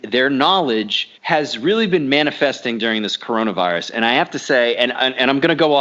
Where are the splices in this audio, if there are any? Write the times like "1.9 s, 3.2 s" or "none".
1.2 s